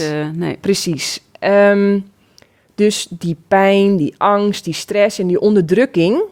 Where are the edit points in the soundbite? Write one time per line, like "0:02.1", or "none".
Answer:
none